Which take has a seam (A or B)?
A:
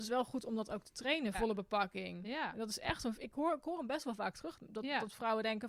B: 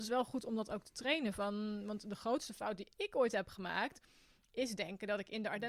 A